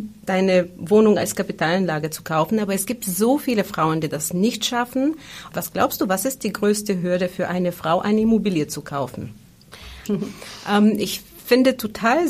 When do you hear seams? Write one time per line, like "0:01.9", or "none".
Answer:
0:05.5
0:10.0

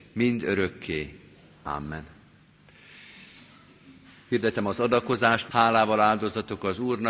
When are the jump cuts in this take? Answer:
0:05.5

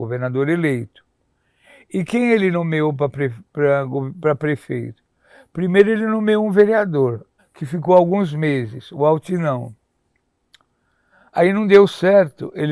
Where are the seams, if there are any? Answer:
0:07.4

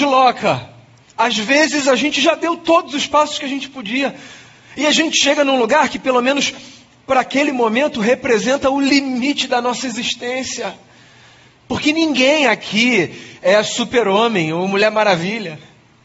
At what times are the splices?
0:01.0
0:11.5

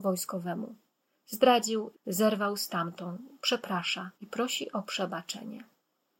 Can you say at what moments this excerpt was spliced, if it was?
0:01.9
0:04.1

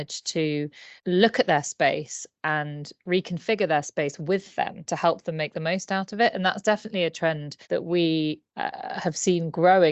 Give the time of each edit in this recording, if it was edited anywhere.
0:01.0
0:07.6

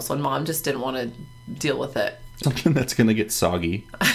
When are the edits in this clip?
0:02.4

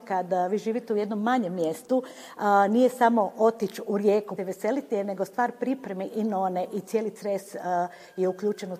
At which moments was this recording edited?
0:04.4
0:06.1

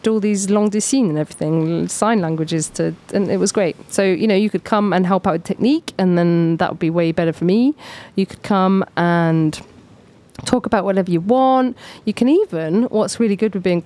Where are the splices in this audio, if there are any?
none

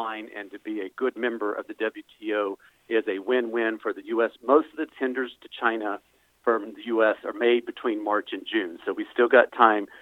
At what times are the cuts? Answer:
0:04.4

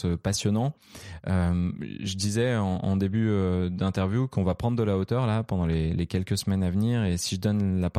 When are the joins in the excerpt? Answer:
none

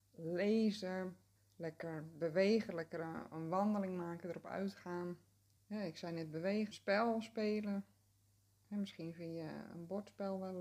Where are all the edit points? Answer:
0:01.4
0:05.6
0:06.7

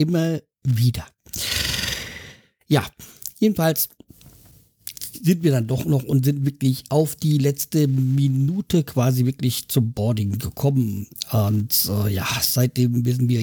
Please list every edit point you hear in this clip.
none

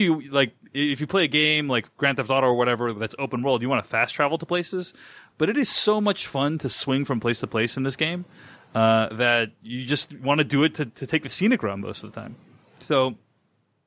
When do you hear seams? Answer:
none

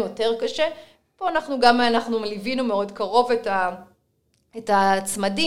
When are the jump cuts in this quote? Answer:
none

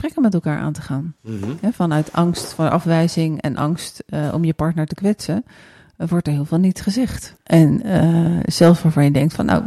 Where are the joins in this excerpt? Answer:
0:07.4

